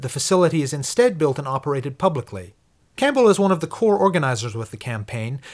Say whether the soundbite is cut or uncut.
uncut